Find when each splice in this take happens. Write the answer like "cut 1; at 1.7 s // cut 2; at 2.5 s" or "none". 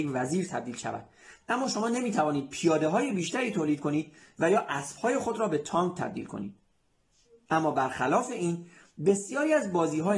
cut 1; at 7.5 s